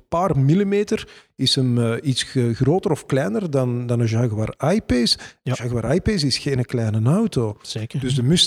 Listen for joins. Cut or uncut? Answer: uncut